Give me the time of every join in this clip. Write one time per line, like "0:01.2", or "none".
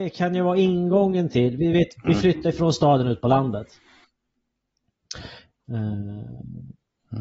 0:02.0
0:05.5